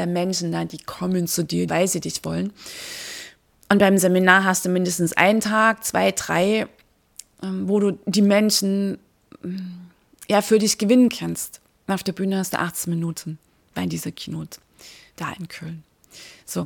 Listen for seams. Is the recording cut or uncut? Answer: cut